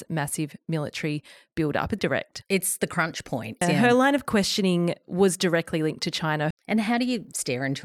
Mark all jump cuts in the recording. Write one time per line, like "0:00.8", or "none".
0:02.0
0:03.6
0:06.5